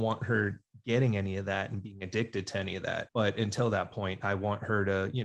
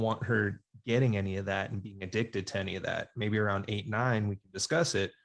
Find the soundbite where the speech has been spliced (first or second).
first